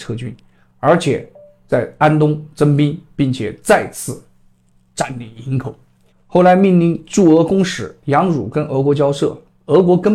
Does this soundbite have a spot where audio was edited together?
yes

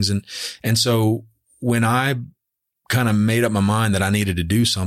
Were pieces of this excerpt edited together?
no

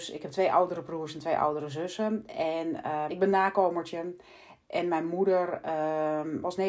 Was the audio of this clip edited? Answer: yes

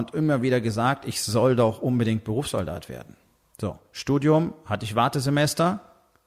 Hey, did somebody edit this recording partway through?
yes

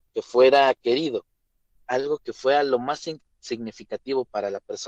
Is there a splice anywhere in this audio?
no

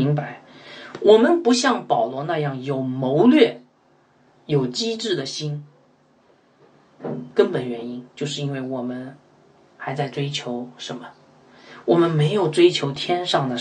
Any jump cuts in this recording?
no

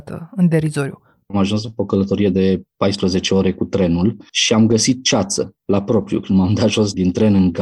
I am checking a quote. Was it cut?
no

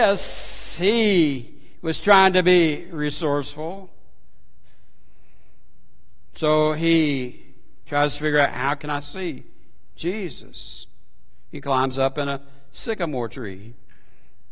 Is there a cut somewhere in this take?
no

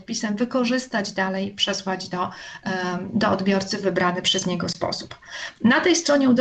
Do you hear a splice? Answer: no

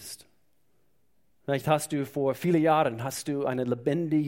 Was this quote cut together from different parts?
no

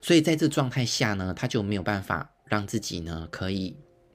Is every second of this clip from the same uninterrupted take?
yes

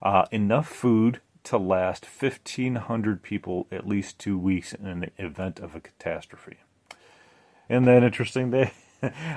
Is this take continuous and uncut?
no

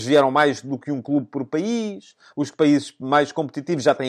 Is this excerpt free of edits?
yes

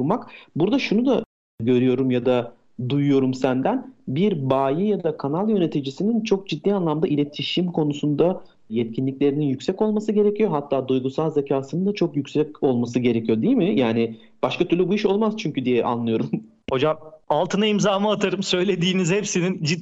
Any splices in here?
no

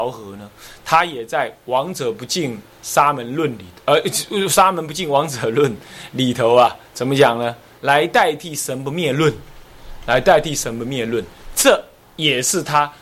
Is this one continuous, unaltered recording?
no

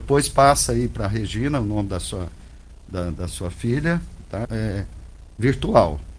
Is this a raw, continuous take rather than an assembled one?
no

